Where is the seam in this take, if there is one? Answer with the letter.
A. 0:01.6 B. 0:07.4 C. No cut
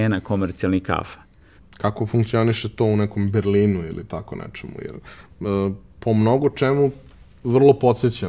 A